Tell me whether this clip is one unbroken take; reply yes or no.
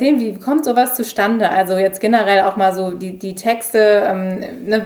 yes